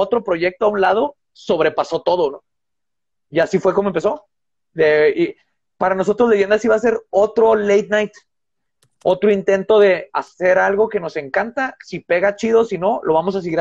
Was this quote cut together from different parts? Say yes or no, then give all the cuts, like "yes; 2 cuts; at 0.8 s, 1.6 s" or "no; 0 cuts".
no; 0 cuts